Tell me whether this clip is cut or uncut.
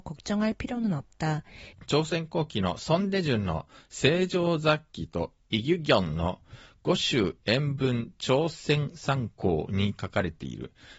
cut